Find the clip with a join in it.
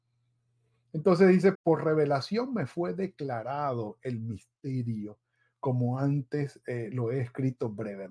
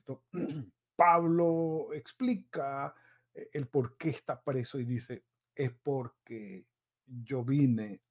first; 1 cut; at 1.5 s

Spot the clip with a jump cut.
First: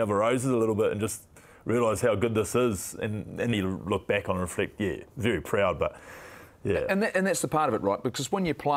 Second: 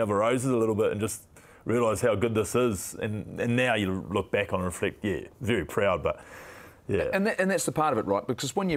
first; 1 cut; at 3.5 s

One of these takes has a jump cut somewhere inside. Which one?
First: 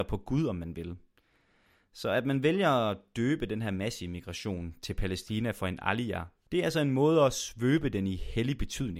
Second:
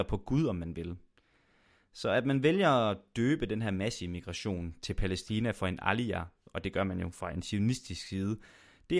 first; 1 cut; at 6.5 s

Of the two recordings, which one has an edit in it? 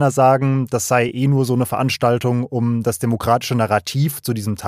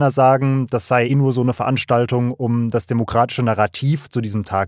second; 1 cut; at 1.1 s

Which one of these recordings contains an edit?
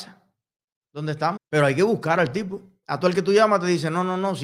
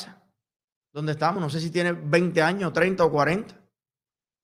first; 2 cuts; at 1.4 s, 2.8 s

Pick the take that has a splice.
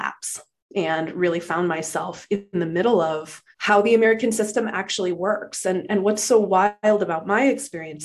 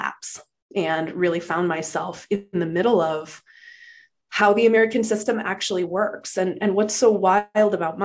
first; 1 cut; at 3.5 s

